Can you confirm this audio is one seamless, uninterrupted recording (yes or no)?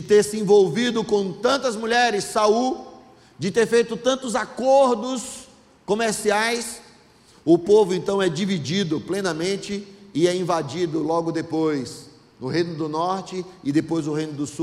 yes